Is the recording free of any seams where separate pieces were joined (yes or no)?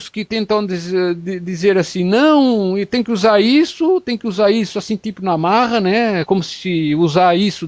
yes